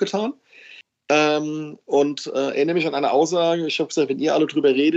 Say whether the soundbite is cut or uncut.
uncut